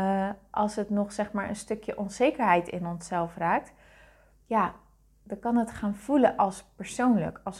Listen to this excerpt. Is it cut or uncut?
uncut